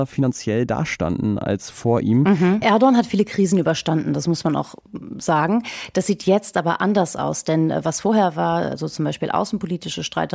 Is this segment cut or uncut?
cut